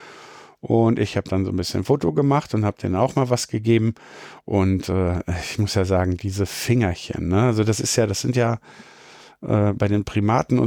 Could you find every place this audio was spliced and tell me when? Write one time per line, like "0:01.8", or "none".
none